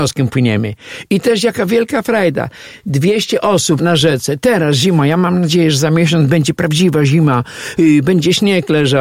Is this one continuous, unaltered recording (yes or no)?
no